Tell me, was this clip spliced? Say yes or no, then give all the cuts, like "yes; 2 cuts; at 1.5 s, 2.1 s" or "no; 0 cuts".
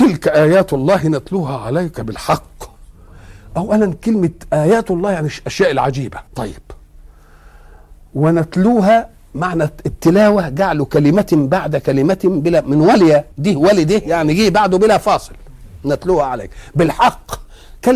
yes; 2 cuts; at 6.3 s, 13.3 s